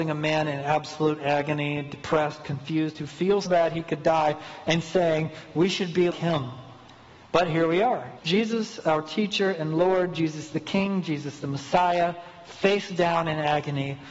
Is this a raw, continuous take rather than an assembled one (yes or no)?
no